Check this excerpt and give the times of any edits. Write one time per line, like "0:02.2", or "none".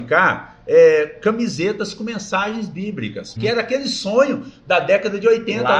0:03.4